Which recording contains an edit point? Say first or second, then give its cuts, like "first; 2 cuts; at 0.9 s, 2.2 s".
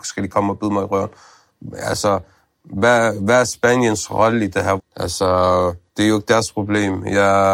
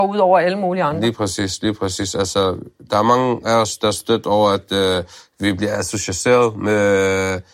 first; 2 cuts; at 4.8 s, 5.9 s